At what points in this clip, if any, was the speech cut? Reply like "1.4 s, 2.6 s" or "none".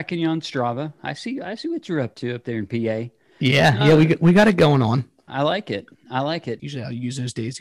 5.3 s, 6.6 s